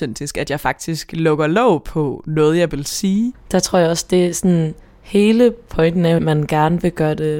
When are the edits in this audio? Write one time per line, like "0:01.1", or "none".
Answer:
0:03.3
0:06.2